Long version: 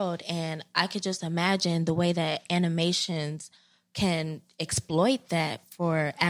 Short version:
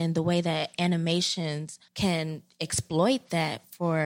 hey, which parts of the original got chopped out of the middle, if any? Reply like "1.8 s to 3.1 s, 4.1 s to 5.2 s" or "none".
3.6 s to 3.9 s